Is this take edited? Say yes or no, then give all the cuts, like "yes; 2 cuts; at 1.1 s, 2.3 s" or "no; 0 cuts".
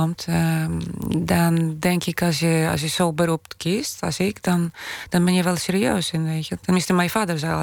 no; 0 cuts